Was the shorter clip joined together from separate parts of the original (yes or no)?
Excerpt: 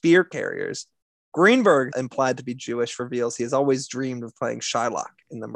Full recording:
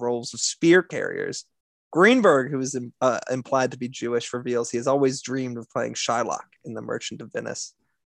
yes